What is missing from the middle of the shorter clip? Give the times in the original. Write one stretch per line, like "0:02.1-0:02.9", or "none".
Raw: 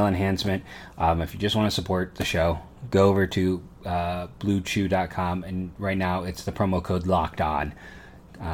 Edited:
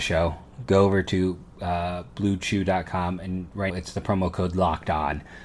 0:05.9-0:06.2

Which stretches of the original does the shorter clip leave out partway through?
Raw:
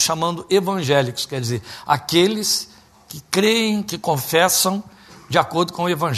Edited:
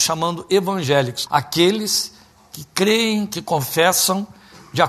0:01.3-0:01.8

